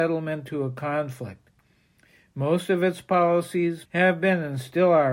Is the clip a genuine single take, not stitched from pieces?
no; 1 cut; at 3.9 s

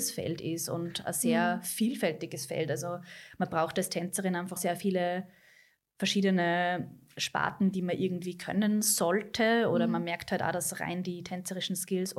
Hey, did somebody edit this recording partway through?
yes; 1 cut; at 4.6 s

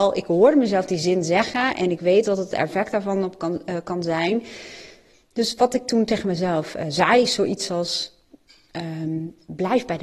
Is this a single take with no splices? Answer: yes; 0 cuts

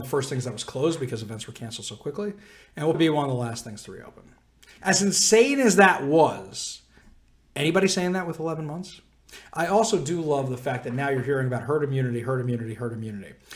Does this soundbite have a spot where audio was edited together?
yes; 2 cuts; at 2.9 s, 4.8 s

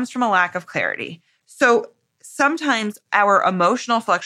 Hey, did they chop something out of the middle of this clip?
no; 0 cuts

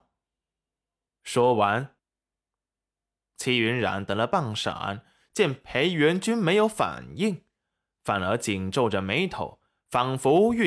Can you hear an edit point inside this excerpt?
yes; 1 cut; at 2.0 s

